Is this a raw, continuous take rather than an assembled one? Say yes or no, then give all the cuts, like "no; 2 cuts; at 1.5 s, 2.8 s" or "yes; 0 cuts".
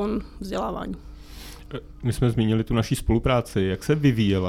yes; 0 cuts